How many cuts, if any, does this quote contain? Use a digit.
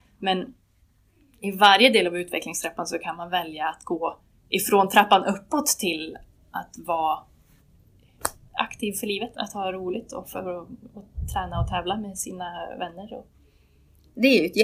1